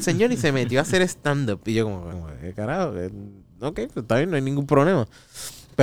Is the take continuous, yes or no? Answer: no